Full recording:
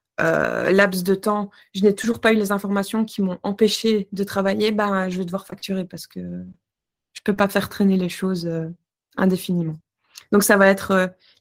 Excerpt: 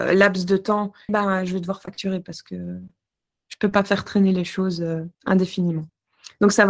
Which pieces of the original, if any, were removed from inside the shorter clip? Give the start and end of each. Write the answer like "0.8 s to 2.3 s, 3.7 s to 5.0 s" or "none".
1.7 s to 4.7 s, 8.8 s to 9.1 s